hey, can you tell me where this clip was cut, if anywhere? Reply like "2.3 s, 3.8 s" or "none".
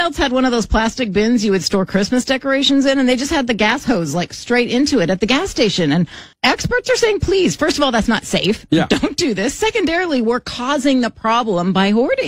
6.3 s